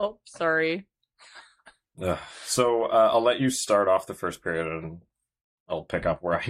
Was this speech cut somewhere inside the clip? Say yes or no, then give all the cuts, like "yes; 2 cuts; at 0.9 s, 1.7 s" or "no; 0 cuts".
no; 0 cuts